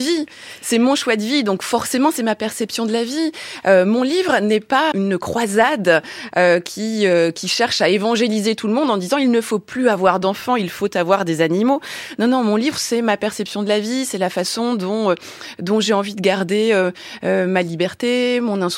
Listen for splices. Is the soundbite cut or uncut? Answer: cut